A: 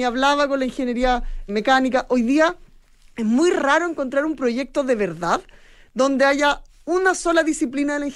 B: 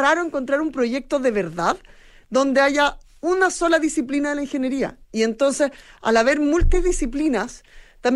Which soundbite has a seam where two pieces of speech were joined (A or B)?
A